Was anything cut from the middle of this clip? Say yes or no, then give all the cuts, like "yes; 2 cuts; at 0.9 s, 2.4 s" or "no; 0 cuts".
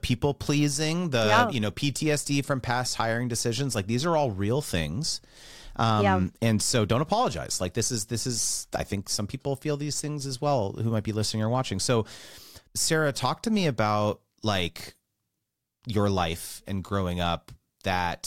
no; 0 cuts